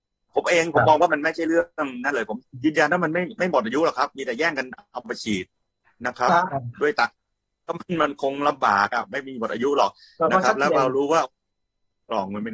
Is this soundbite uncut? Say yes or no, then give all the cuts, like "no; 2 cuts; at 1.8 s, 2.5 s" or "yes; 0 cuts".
yes; 0 cuts